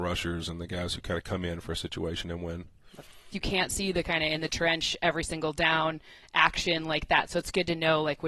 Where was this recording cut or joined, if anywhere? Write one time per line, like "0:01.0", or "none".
0:03.3